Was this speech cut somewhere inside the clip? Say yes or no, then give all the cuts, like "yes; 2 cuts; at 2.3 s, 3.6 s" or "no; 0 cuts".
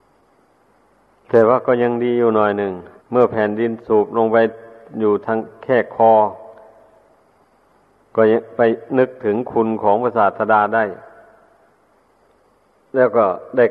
yes; 1 cut; at 3.0 s